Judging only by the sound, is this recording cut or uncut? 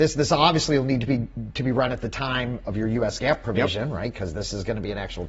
uncut